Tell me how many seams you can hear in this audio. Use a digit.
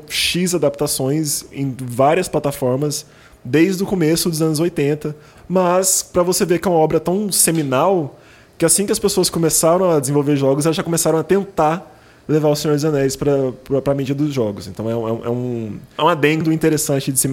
1